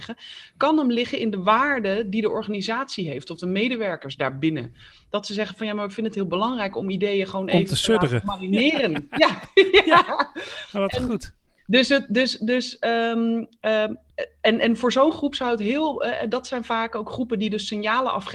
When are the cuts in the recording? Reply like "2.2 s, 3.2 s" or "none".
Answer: none